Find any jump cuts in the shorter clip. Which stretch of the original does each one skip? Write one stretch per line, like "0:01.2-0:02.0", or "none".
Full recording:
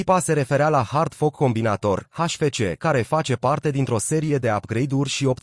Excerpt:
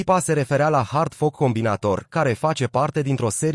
0:02.1-0:02.8